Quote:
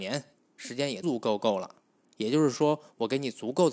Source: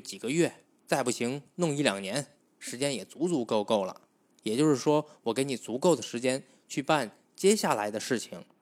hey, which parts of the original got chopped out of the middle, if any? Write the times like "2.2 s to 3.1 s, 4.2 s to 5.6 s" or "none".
3.1 s to 3.3 s